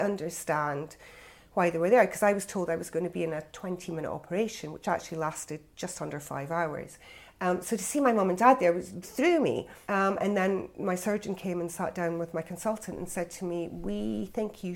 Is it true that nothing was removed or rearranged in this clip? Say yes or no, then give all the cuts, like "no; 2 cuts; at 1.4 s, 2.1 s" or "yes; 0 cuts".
no; 1 cut; at 9.0 s